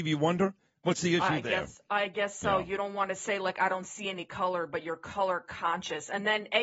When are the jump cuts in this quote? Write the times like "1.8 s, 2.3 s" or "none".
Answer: none